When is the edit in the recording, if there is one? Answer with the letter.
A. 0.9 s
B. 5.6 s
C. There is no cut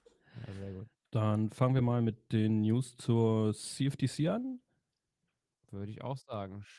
A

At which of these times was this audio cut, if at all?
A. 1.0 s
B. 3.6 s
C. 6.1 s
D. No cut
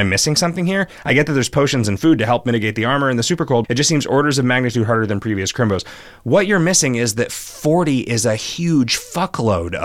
B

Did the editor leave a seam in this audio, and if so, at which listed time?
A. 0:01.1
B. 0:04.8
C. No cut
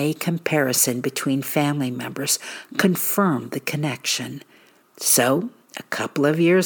B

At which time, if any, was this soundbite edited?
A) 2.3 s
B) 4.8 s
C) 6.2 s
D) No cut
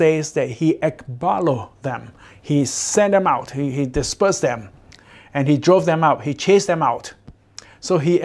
D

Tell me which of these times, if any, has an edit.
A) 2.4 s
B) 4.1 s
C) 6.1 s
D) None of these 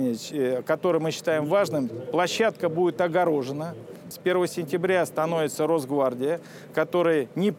B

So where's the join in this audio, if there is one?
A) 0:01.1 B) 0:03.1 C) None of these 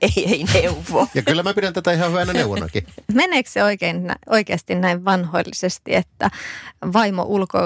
A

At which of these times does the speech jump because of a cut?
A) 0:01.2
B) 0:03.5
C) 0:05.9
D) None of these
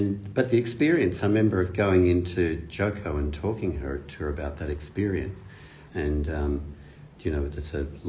C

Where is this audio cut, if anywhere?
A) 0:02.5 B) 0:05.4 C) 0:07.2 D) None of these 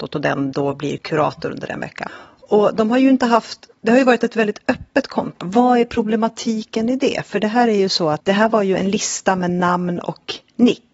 B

